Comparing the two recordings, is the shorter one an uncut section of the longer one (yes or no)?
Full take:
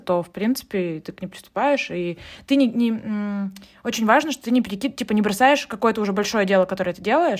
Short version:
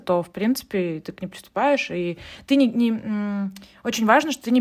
yes